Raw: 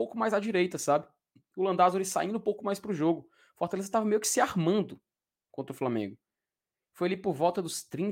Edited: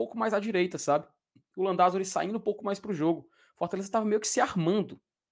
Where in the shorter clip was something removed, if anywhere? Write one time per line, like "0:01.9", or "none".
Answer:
none